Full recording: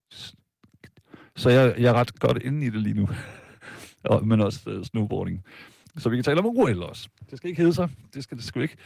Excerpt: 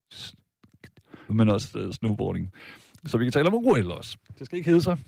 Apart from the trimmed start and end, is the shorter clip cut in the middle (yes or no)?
yes